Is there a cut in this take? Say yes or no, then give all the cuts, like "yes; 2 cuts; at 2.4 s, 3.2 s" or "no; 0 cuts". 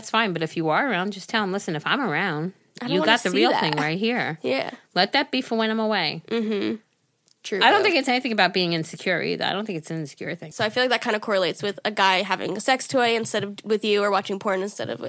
yes; 1 cut; at 10.5 s